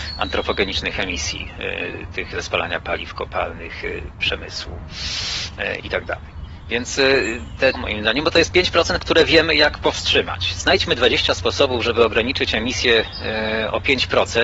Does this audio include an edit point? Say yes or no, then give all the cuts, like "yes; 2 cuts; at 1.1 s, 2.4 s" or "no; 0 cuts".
yes; 1 cut; at 7.7 s